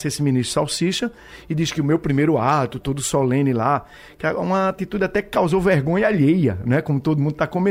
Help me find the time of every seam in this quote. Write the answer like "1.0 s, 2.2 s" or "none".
2.8 s